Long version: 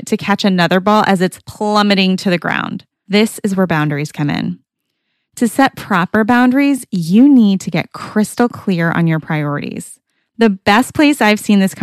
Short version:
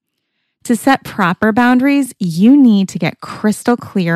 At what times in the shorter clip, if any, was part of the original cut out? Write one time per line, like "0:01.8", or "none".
none